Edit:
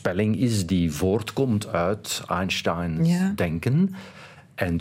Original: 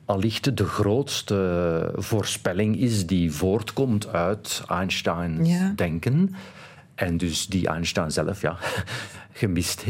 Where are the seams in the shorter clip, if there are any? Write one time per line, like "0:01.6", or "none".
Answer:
none